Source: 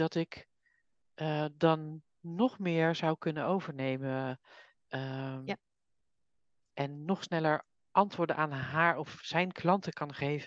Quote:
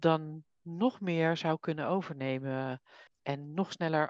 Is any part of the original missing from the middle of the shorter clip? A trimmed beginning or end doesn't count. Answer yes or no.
yes